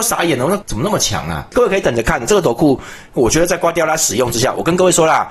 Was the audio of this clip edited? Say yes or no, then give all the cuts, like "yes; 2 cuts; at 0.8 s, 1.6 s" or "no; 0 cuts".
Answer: no; 0 cuts